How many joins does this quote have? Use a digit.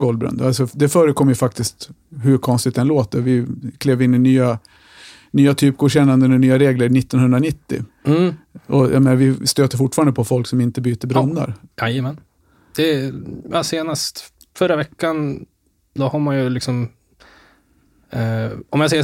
1